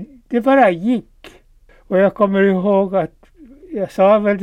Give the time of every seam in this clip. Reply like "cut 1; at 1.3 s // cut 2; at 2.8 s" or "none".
none